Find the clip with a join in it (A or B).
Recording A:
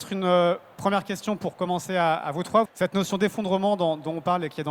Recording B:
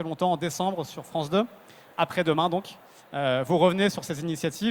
A